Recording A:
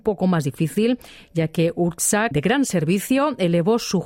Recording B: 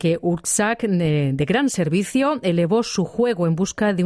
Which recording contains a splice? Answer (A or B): A